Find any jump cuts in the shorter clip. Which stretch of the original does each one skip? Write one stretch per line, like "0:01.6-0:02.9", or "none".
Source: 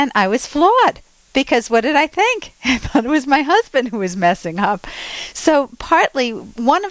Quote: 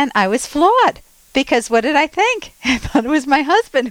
none